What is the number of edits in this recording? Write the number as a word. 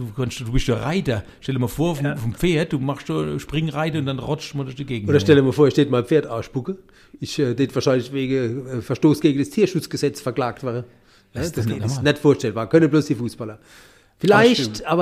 zero